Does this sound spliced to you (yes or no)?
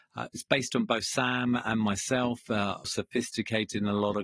yes